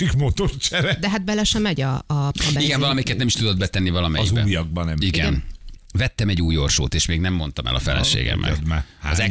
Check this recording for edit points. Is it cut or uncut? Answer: cut